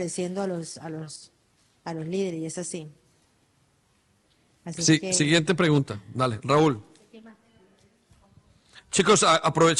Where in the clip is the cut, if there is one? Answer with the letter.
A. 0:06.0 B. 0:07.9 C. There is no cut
C